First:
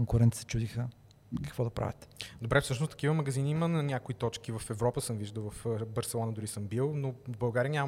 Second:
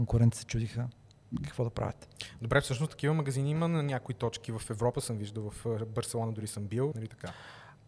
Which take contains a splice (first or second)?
second